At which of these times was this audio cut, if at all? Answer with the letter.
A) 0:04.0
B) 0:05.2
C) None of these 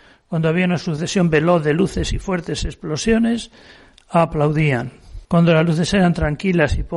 B